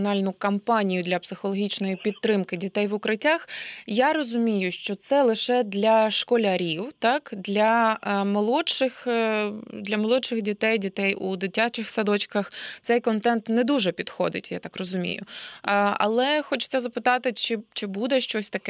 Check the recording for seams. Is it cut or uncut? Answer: uncut